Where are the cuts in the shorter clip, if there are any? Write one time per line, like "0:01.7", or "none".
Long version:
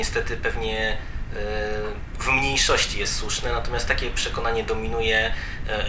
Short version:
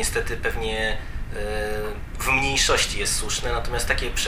none

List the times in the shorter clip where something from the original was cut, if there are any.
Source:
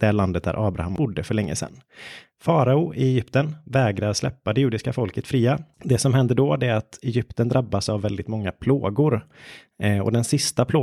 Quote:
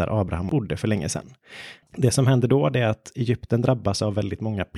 0:01.8

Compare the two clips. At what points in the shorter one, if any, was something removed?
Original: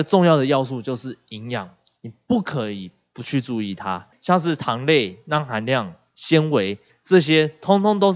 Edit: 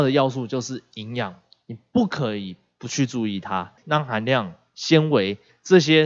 0:03.8

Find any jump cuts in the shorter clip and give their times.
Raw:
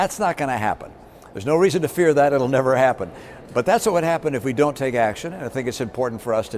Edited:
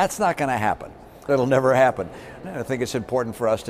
0:01.3
0:02.4

